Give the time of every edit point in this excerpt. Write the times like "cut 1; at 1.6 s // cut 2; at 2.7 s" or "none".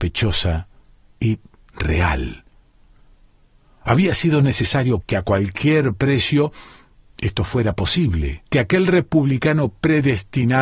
cut 1; at 5.0 s // cut 2; at 8.5 s